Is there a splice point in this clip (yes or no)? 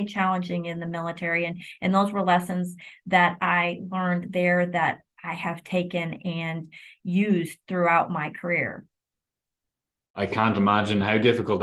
no